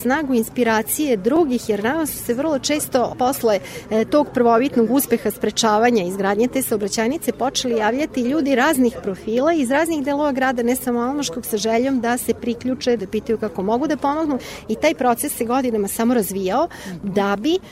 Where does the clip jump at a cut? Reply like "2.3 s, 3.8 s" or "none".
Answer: 13.0 s